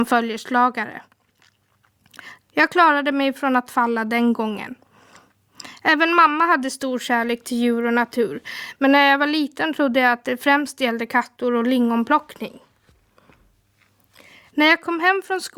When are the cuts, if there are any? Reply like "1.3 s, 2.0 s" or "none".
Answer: 2.5 s